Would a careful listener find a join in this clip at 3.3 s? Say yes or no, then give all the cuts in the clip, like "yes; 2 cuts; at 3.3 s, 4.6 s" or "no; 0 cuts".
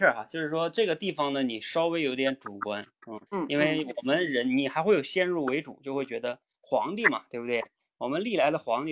yes; 1 cut; at 3.3 s